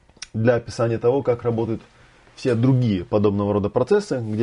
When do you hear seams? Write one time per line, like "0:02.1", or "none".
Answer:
none